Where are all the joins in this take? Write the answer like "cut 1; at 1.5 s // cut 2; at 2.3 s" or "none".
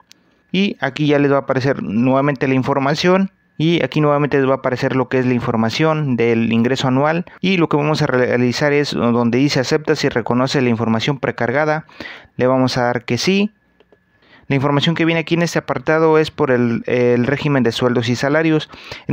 none